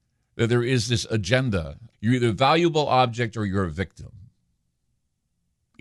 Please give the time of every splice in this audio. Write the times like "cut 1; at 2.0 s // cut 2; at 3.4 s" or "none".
cut 1; at 1.9 s

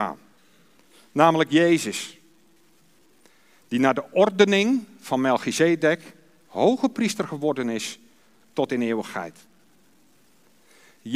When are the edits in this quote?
none

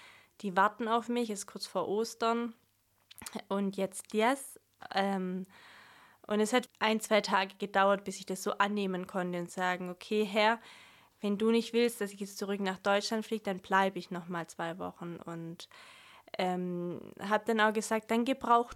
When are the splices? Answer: cut 1; at 6.7 s

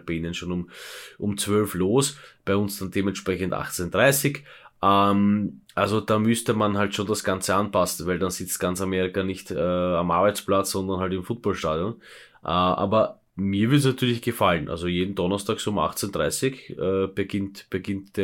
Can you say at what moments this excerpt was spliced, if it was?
cut 1; at 12.3 s

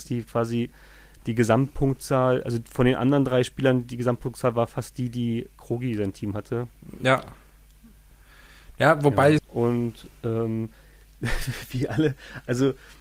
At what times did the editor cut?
cut 1; at 9.4 s

